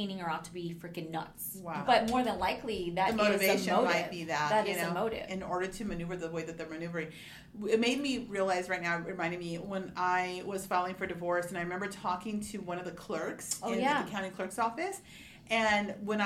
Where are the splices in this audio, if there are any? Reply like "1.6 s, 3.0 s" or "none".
1.8 s, 5.3 s